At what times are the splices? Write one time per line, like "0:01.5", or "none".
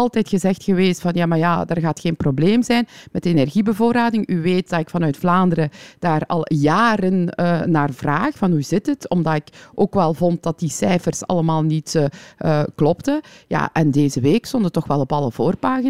none